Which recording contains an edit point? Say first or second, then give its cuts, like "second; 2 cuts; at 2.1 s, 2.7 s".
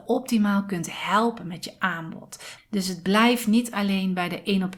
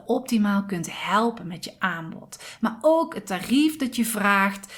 first; 1 cut; at 2.6 s